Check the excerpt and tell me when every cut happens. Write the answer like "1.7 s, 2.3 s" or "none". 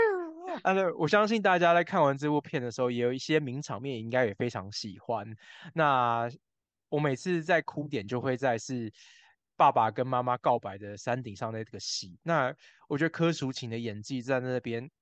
none